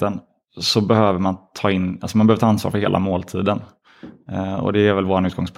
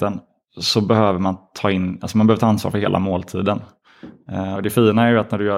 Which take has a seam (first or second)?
second